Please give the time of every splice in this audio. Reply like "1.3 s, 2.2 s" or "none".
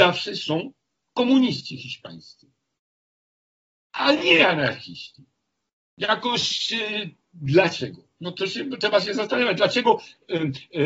none

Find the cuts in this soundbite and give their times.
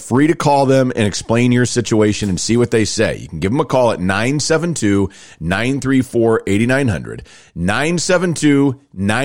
none

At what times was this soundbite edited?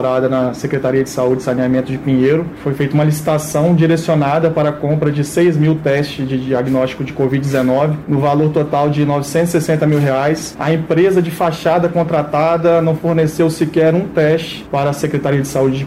10.5 s

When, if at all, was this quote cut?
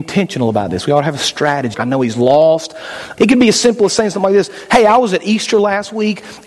1.7 s, 3.2 s

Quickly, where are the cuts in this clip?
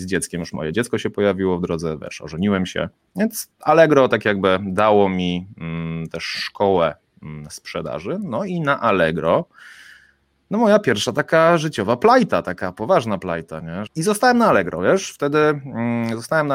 13.9 s

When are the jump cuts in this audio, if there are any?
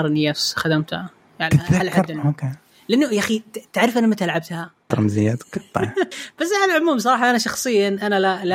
4.9 s, 6.1 s

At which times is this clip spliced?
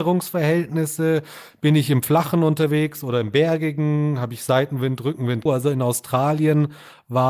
5.5 s

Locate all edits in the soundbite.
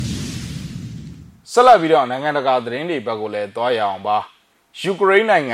none

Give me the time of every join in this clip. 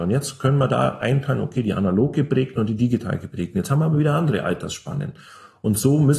none

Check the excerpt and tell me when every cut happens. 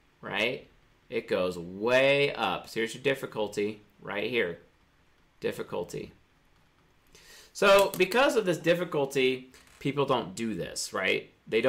none

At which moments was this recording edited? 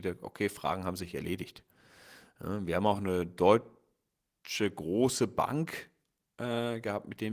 none

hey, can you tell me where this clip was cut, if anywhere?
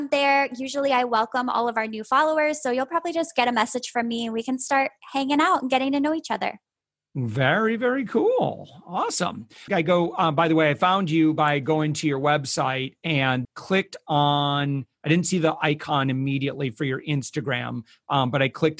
9.7 s, 13.4 s

